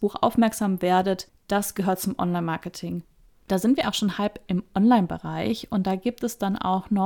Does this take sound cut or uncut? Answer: cut